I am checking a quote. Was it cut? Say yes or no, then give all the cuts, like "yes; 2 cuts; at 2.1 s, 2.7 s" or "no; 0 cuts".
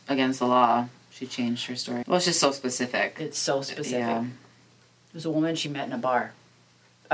yes; 1 cut; at 2.0 s